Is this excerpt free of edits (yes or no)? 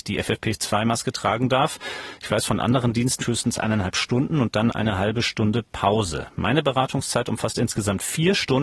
no